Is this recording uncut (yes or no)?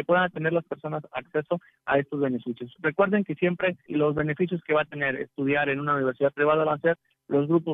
no